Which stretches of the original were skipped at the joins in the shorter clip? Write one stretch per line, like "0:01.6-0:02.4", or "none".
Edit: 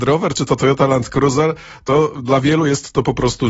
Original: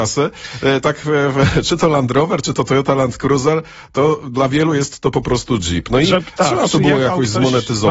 none